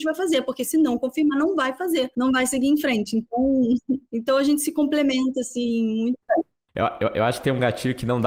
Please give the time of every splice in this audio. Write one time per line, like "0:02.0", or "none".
none